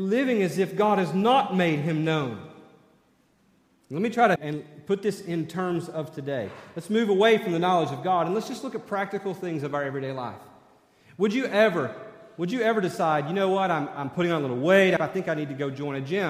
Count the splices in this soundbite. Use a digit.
2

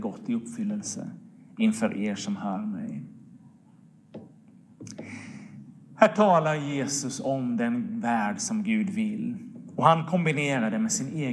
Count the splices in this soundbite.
0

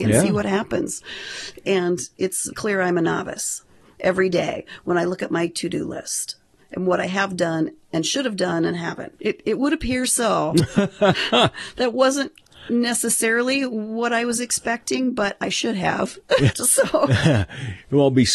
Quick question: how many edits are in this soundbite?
3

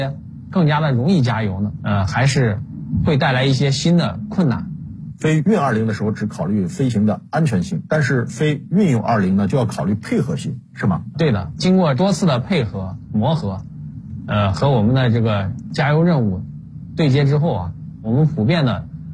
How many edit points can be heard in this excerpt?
1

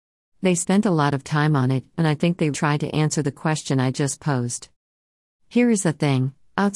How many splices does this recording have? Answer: 1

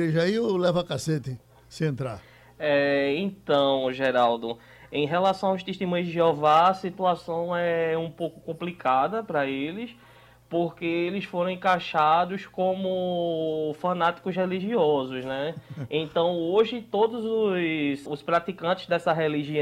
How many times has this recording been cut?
1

